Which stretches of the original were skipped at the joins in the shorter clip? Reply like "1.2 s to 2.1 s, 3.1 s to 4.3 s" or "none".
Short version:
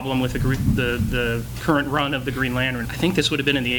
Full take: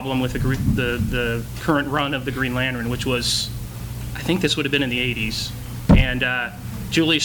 2.8 s to 4.1 s